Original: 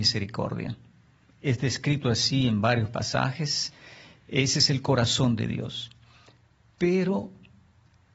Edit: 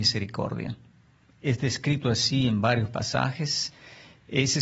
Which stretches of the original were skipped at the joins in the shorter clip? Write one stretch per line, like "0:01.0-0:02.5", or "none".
none